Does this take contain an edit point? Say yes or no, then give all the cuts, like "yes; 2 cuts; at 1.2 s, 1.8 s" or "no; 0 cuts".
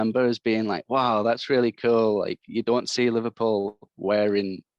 no; 0 cuts